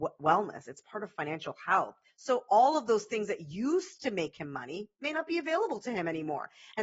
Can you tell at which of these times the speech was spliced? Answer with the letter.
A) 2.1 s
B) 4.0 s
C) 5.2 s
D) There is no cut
A